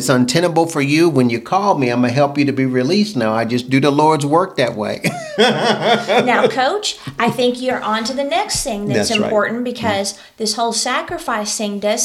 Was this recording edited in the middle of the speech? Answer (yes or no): no